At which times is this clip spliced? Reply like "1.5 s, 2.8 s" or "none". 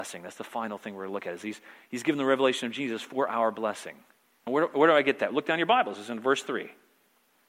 none

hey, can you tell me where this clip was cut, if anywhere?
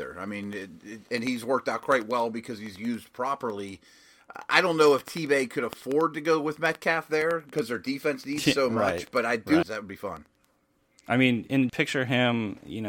9.6 s, 11.7 s

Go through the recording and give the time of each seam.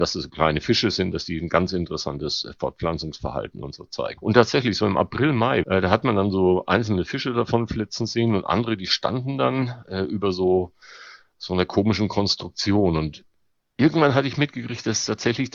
4.2 s, 5.6 s

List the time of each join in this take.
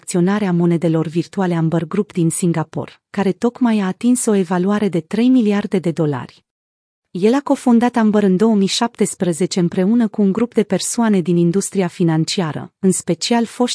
7.0 s

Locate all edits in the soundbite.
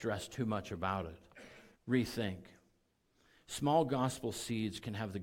1.7 s

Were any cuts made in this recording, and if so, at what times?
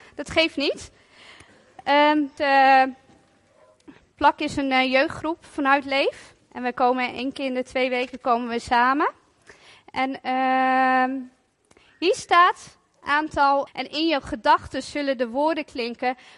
2.4 s, 4.1 s, 13.7 s

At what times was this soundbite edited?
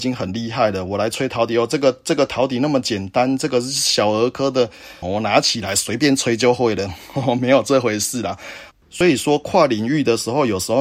5.0 s, 8.7 s

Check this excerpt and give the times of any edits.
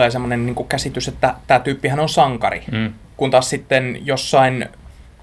none

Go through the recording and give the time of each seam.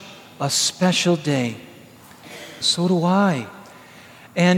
2.6 s

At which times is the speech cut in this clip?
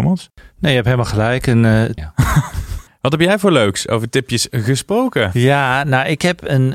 2.0 s

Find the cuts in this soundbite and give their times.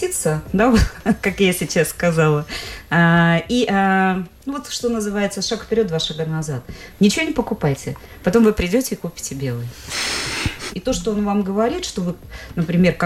6.9 s, 10.7 s

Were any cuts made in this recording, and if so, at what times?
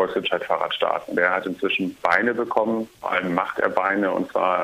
none

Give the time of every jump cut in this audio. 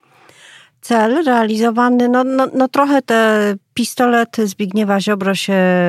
none

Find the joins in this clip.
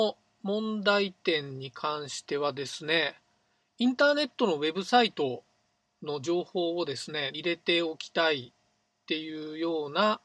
7.3 s

